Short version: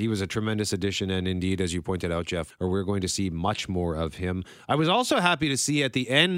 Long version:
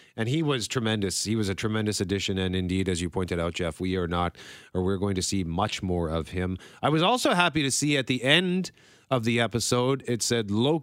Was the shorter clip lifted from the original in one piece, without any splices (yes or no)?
no